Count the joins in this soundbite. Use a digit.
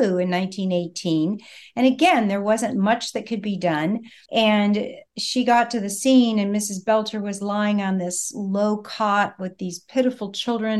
1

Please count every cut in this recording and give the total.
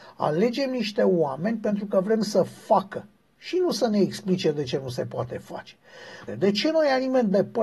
1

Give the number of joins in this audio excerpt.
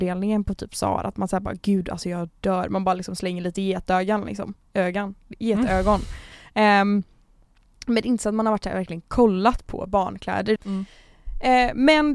1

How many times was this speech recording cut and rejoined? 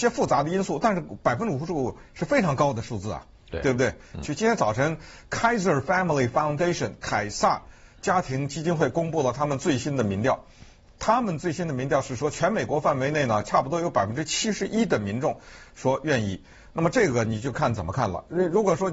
1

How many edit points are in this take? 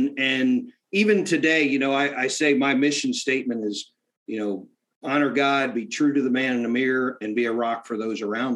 0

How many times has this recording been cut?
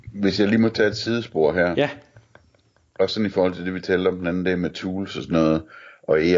0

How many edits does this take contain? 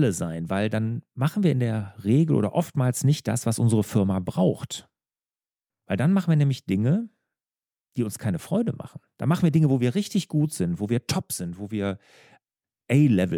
1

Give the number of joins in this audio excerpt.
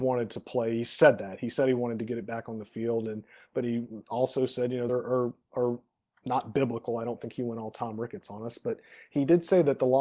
1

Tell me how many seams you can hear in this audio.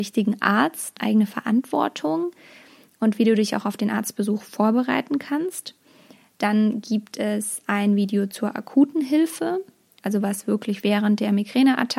1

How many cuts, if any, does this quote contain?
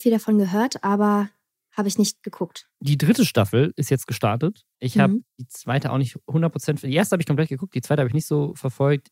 0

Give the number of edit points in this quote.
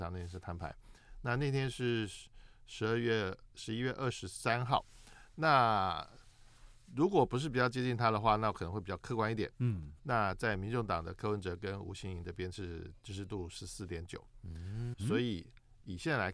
2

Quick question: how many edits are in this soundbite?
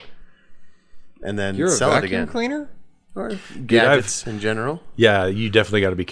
0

